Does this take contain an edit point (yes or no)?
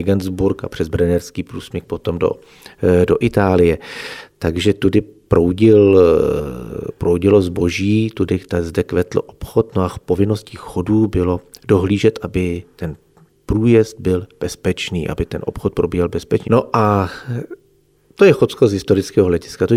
yes